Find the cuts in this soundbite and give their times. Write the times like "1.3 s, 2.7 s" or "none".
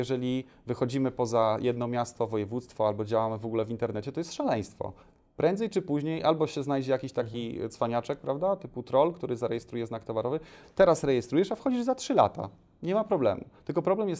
10.6 s